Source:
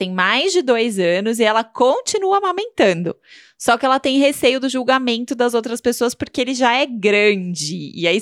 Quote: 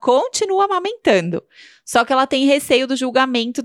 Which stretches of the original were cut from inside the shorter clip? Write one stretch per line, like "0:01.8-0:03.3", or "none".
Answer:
none